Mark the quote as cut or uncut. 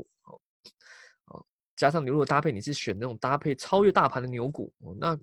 uncut